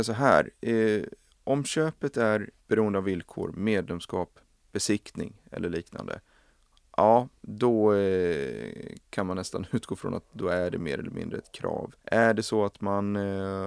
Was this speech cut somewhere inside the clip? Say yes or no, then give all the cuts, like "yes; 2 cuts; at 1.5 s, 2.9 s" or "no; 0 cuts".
yes; 2 cuts; at 2.6 s, 12.0 s